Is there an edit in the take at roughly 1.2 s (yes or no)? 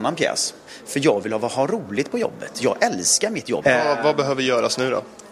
no